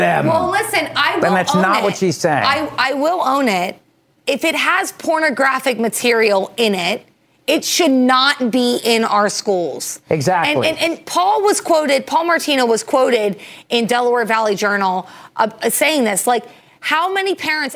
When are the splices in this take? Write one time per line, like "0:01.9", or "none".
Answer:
none